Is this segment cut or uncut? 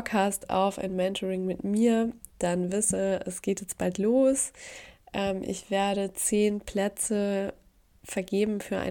uncut